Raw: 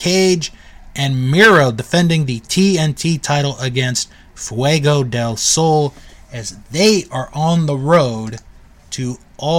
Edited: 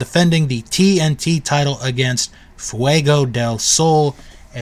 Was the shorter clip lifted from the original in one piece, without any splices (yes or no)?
yes